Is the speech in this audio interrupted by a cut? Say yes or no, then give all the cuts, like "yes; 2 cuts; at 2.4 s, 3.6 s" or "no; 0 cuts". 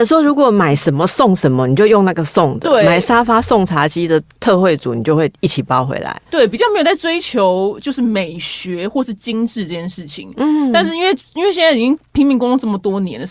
no; 0 cuts